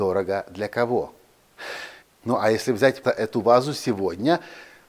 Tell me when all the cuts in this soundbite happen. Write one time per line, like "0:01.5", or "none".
0:02.0
0:03.0